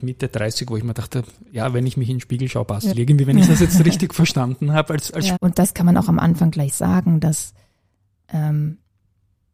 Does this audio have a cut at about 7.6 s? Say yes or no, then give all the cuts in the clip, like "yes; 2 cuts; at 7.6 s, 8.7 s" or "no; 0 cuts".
no; 2 cuts; at 2.9 s, 5.4 s